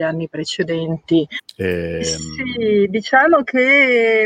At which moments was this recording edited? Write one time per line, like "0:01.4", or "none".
0:01.4